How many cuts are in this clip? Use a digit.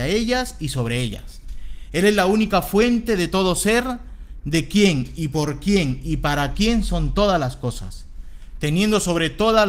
0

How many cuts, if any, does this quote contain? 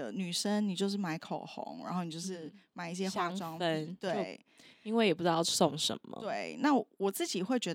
0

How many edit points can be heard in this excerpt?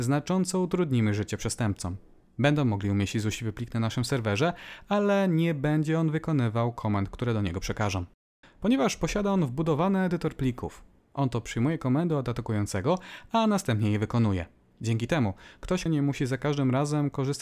3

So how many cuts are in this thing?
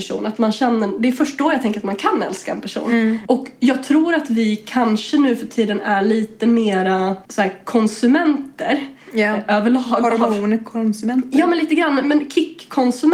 1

